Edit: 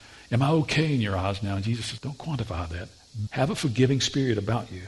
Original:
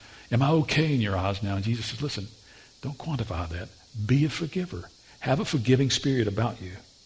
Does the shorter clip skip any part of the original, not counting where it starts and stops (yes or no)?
yes